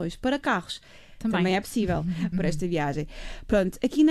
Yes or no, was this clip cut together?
yes